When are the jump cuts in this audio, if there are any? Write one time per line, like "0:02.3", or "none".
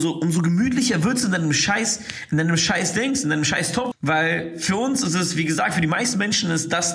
0:03.9

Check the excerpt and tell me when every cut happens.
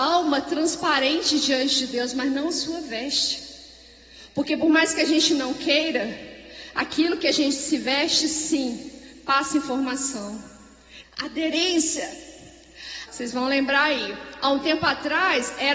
0:11.0
0:13.1

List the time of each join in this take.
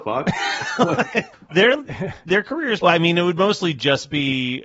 0:01.5
0:02.8

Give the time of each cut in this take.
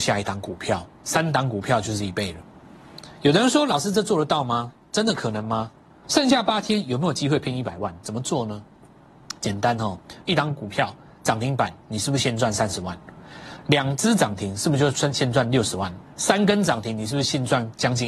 0:06.0
0:08.0
0:10.2

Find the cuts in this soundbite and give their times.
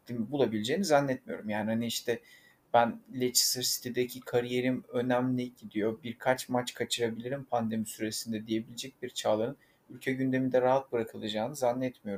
none

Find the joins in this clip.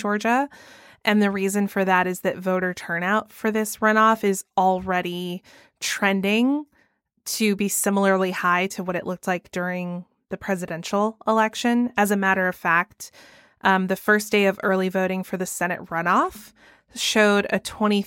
none

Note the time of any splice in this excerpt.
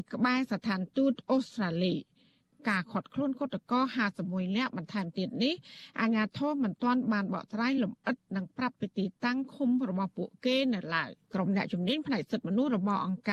0:11.2

